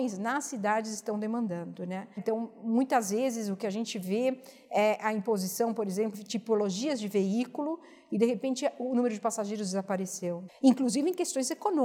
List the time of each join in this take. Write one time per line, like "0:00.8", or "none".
0:02.2
0:06.1
0:10.5

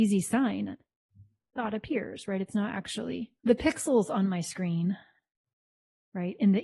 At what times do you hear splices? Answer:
0:03.4

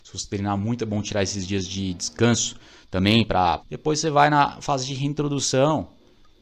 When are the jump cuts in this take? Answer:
0:03.6

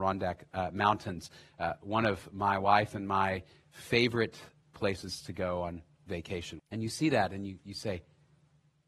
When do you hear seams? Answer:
0:06.6

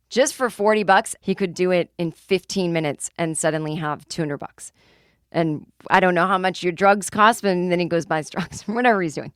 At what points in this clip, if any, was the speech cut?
0:01.2

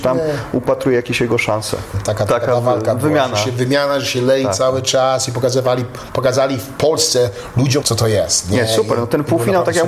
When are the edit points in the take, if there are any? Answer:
0:01.9
0:07.8

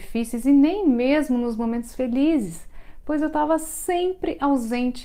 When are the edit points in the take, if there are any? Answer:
none

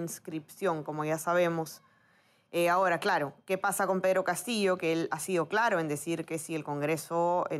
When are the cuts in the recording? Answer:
0:05.1

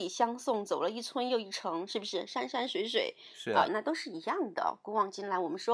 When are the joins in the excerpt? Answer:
0:03.7

